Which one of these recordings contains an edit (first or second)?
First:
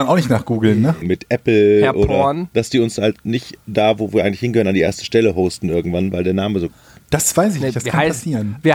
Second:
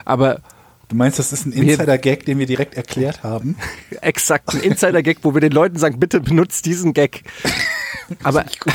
first